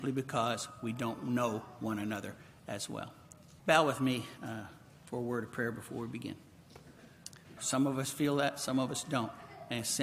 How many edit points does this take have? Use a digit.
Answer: 2